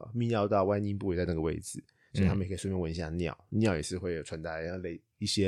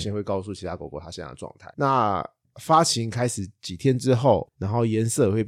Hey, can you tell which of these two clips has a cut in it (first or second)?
second